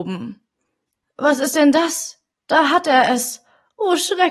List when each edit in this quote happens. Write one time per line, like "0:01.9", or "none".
0:01.0
0:02.3